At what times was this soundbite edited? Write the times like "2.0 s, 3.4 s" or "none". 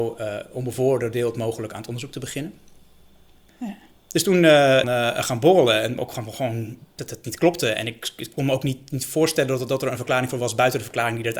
3.5 s, 4.8 s